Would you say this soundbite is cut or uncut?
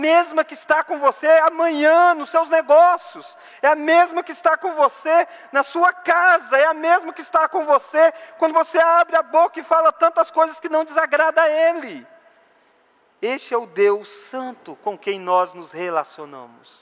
uncut